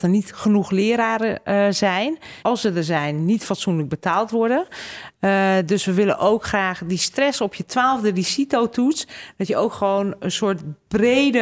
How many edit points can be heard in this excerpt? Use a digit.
1